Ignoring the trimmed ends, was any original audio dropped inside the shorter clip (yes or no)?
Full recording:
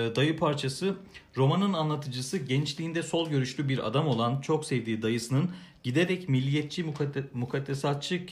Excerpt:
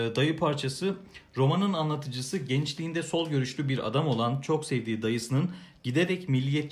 no